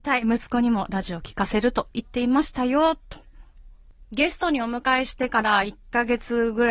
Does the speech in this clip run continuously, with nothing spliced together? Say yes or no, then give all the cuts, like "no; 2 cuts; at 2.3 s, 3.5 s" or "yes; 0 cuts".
yes; 0 cuts